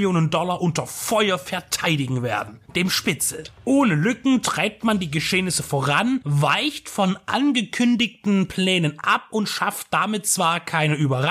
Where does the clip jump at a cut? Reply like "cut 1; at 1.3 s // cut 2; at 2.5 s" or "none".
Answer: cut 1; at 2.6 s